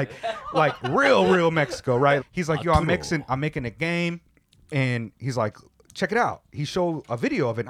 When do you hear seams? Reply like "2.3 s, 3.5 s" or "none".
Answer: 2.2 s